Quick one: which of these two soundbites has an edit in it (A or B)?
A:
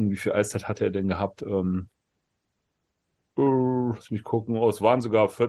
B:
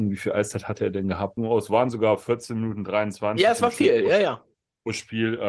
B